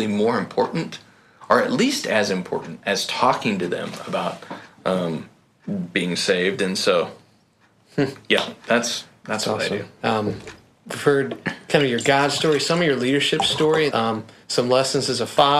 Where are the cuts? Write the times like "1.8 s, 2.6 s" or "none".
10.0 s, 13.9 s